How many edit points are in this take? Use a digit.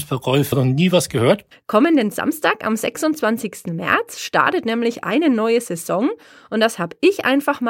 1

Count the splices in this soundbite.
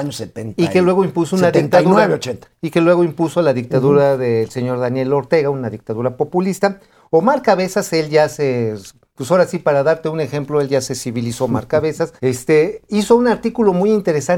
1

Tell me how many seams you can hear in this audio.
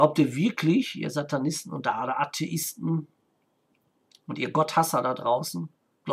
0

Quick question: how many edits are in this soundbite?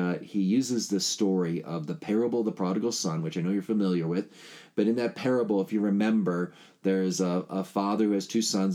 0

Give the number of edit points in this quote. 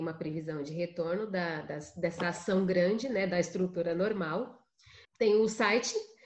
1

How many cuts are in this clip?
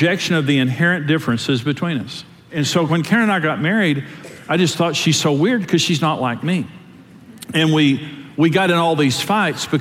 0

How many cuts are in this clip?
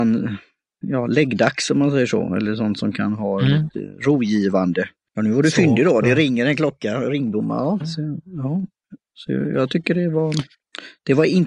2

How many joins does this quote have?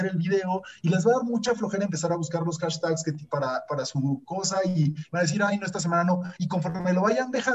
0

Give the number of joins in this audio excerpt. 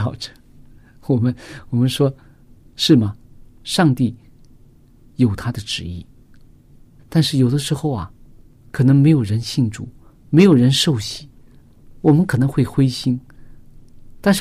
2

